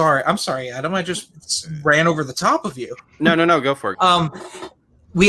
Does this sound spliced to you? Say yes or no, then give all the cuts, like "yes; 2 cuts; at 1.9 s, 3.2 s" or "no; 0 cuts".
yes; 1 cut; at 3.9 s